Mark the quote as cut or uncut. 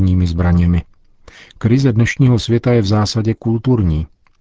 uncut